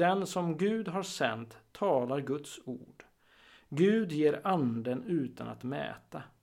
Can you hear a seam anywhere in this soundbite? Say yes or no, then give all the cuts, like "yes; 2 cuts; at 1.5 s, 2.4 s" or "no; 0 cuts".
no; 0 cuts